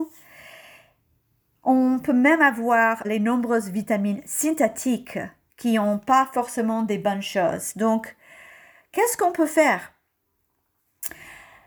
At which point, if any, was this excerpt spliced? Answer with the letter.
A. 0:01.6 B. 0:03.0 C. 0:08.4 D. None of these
B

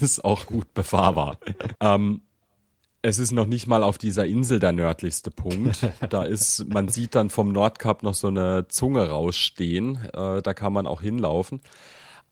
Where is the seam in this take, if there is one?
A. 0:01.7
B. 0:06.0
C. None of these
A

